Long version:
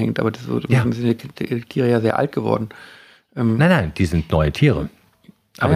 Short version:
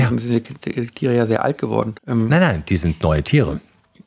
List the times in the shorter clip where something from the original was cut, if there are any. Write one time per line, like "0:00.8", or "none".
0:02.0